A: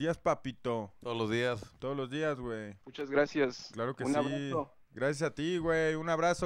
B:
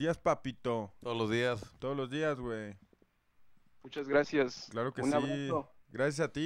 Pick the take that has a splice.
A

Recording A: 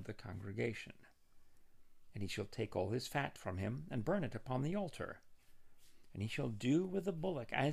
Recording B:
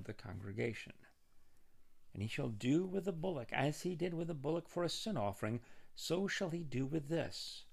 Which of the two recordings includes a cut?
B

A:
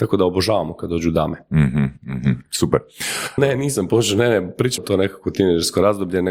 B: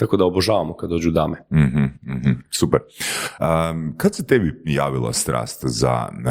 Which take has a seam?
A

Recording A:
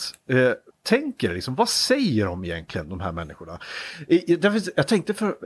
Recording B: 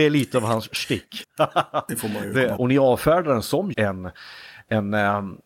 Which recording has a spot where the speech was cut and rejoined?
B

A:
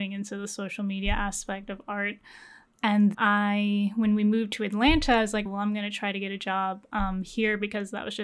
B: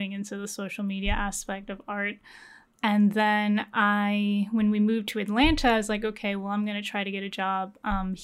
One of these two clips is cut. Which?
A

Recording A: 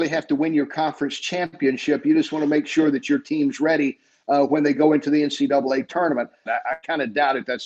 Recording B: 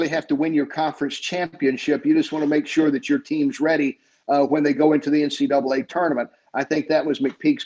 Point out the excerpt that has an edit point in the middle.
A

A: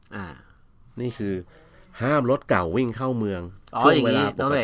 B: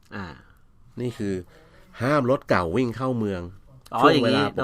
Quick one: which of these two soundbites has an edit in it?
A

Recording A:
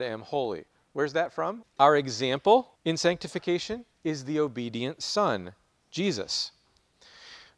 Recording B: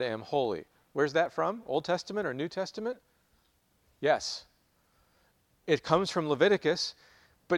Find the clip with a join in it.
A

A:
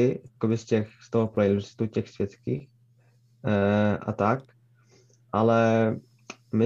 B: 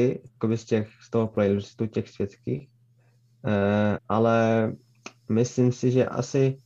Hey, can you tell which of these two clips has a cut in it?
B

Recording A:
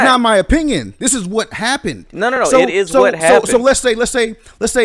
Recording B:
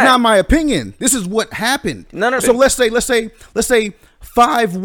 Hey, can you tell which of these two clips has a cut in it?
B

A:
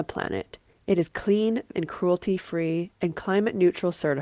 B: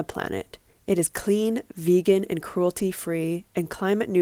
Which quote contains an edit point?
A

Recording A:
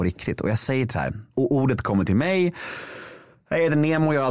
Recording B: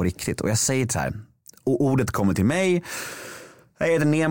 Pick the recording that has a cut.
A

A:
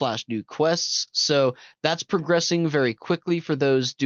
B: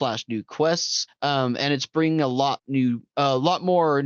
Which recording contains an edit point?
B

